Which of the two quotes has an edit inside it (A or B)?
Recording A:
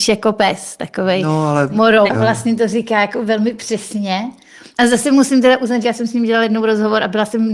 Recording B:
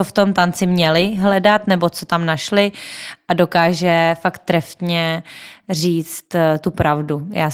A